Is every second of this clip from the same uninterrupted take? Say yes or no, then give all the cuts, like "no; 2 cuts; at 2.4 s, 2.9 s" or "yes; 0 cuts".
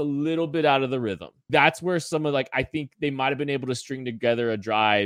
no; 1 cut; at 1.5 s